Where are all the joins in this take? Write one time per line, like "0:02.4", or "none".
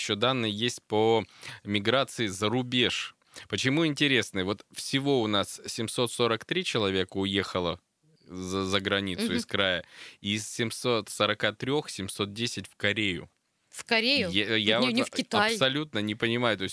none